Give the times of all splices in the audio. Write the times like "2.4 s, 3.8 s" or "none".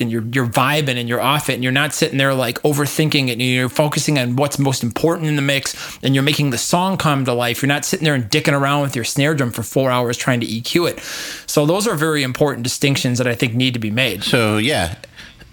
none